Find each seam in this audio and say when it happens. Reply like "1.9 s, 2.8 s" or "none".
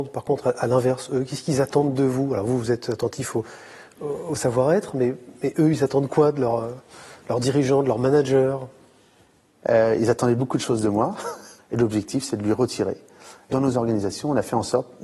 11.6 s, 13.5 s